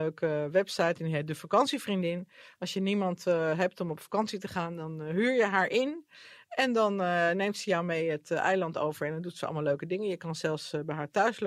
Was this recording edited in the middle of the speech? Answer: no; 0 cuts

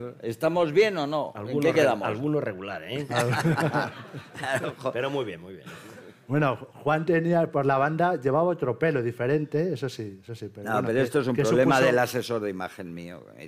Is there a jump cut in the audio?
no; 0 cuts

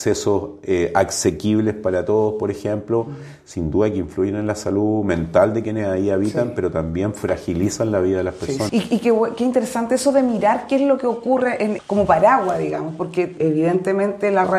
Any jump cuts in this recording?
yes; 3 cuts; at 8.7 s, 11.8 s, 13.4 s

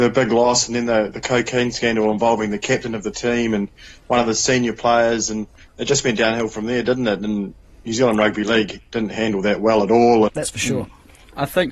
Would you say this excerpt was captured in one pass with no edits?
no; 1 cut; at 10.3 s

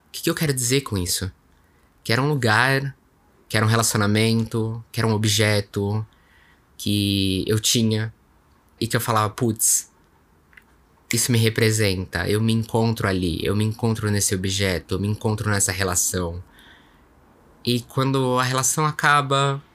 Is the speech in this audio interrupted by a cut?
yes; 1 cut; at 8.8 s

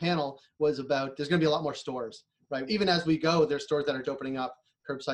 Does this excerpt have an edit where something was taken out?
yes; 2 cuts; at 2.7 s, 4.0 s

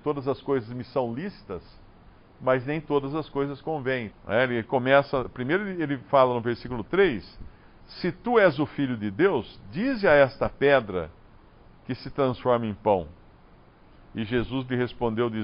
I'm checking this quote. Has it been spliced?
yes; 1 cut; at 4.1 s

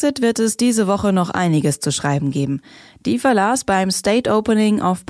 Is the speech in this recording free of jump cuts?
no; 1 cut; at 2.9 s

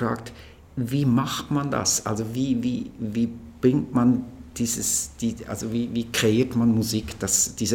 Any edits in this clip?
no; 0 cuts

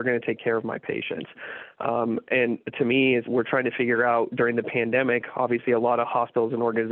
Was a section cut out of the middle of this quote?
yes; 1 cut; at 3.2 s

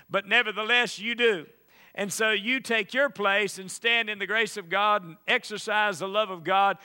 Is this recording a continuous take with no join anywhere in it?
yes; 0 cuts

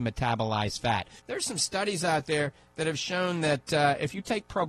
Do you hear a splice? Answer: yes; 1 cut; at 1.2 s

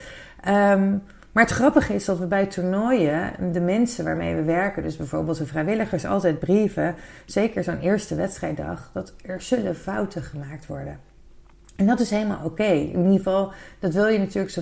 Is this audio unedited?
yes; 0 cuts

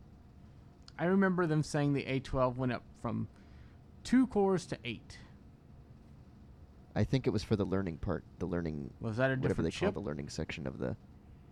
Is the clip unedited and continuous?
no; 1 cut; at 9.0 s

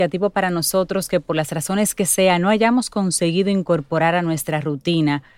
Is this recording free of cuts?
yes; 0 cuts

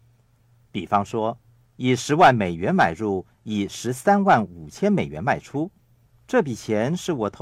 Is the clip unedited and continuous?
no; 1 cut; at 6.1 s

